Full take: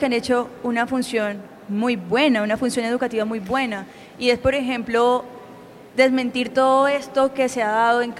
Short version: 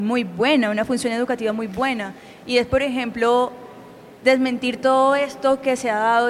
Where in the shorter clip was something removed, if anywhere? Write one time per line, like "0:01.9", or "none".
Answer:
none